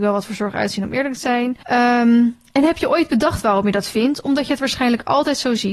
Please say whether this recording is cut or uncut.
cut